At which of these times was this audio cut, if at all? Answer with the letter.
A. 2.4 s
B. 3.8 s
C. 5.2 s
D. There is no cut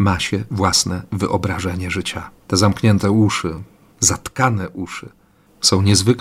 A